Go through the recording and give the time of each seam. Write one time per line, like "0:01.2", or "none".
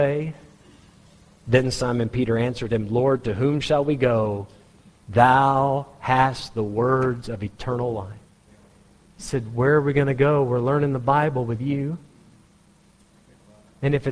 none